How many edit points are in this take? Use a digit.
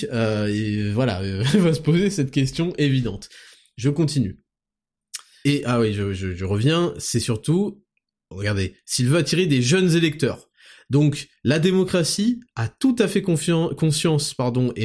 1